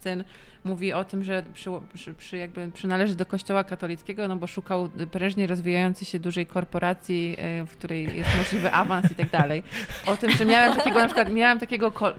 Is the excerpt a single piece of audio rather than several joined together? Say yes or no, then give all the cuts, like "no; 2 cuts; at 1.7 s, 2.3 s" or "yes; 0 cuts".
no; 1 cut; at 10.0 s